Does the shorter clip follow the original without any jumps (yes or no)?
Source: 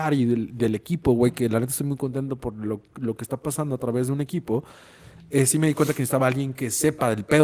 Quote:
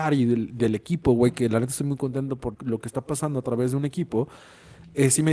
no